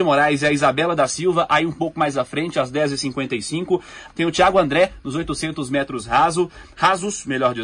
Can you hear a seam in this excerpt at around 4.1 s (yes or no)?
yes